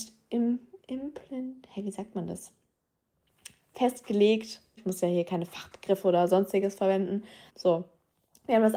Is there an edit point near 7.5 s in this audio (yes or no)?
yes